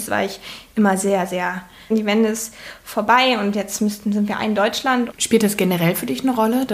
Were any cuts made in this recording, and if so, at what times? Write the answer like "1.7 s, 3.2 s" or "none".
1.9 s, 5.1 s